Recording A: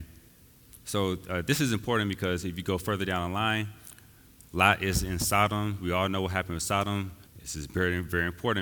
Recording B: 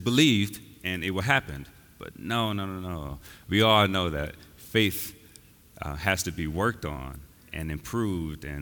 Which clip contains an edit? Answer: A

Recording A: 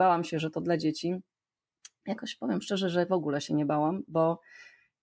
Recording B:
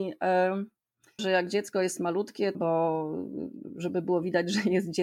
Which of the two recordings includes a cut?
B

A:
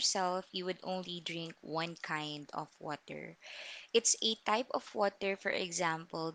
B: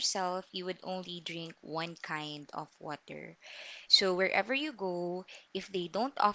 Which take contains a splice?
B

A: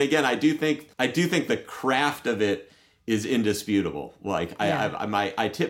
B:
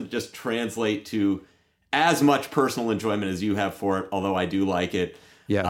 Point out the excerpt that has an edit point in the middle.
A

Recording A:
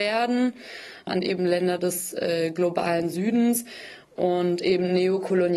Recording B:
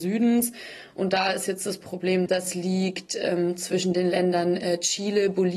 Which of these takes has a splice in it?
B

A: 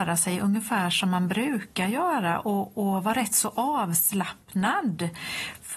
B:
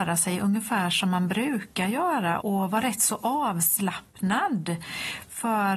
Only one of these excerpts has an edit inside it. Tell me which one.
B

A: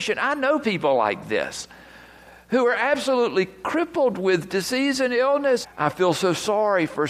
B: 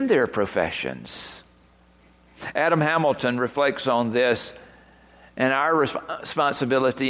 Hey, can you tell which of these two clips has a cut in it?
A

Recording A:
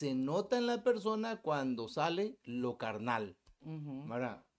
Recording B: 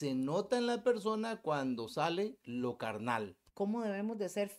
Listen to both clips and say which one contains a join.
B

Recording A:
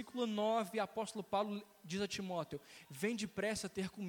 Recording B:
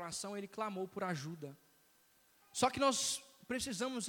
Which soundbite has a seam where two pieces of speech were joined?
B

